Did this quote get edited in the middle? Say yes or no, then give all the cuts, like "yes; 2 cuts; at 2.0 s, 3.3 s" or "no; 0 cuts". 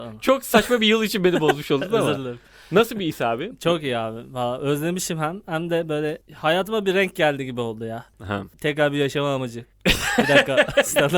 yes; 1 cut; at 9.7 s